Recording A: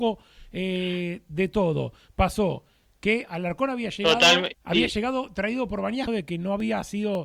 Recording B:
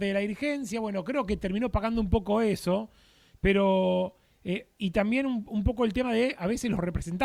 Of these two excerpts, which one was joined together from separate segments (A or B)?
A